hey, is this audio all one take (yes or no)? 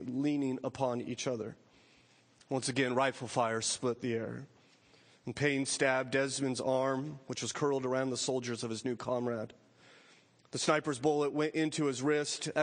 yes